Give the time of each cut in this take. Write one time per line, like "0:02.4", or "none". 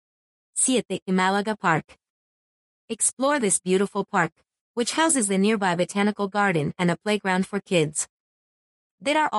none